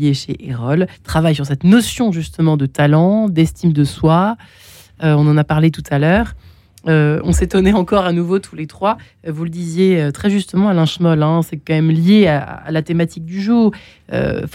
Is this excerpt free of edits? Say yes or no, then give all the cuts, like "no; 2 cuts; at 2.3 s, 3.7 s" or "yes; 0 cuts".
no; 1 cut; at 0.9 s